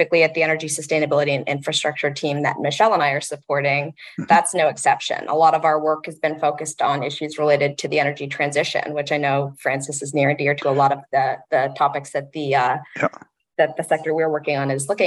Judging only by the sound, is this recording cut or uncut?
uncut